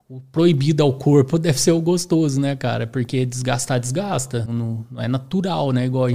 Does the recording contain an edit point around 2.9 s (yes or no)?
no